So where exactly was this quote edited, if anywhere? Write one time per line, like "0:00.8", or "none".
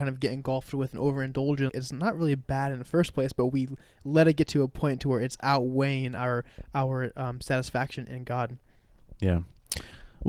0:01.7